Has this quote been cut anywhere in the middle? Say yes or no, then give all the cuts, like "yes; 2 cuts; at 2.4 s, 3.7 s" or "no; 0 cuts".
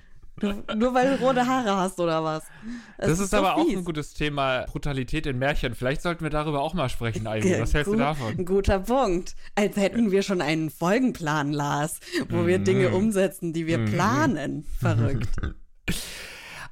no; 0 cuts